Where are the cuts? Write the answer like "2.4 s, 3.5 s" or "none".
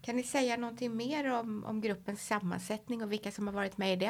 none